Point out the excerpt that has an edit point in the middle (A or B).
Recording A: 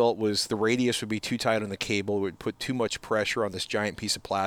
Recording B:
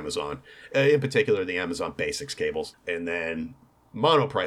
B